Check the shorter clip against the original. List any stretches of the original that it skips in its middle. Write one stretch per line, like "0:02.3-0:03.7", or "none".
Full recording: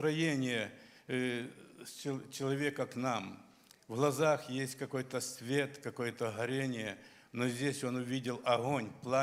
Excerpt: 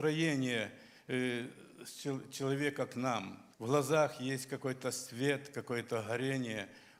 0:03.5-0:03.8